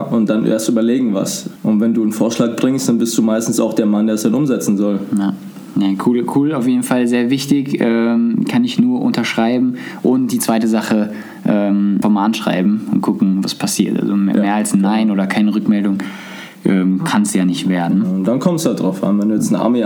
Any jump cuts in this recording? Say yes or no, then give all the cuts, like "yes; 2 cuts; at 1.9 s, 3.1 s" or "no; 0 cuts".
yes; 2 cuts; at 1.6 s, 12.0 s